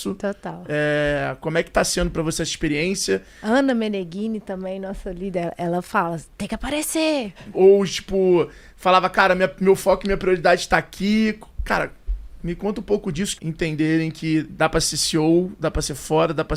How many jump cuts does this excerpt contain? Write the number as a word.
two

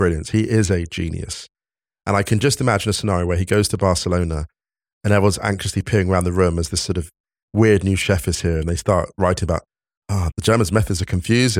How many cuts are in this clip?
one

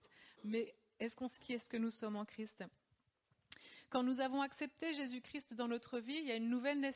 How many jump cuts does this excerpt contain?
one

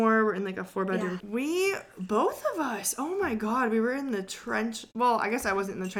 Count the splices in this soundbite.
one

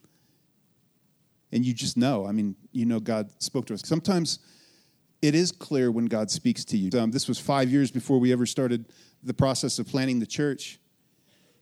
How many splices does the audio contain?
two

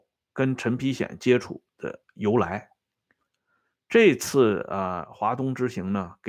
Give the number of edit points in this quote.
zero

